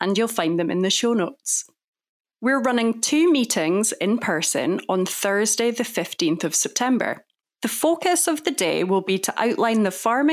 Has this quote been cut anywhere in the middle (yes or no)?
yes